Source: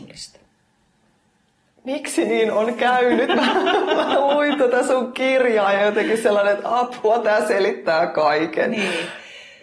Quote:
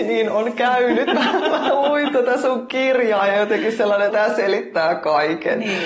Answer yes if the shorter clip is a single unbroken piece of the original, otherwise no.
no